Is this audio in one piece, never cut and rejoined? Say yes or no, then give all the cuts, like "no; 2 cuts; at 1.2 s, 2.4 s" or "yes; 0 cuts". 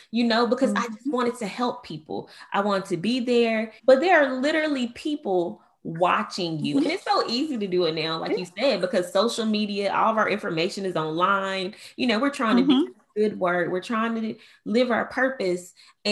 no; 1 cut; at 3.8 s